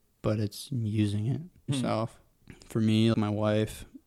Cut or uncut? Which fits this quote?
cut